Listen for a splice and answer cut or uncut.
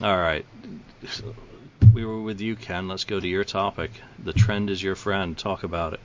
uncut